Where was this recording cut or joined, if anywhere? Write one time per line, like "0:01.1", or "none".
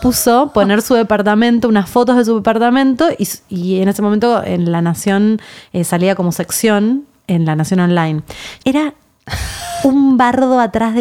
0:08.6